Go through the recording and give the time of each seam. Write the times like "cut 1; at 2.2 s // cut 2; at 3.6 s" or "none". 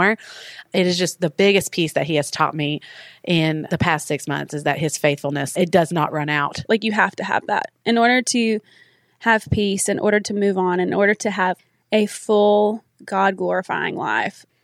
cut 1; at 6.7 s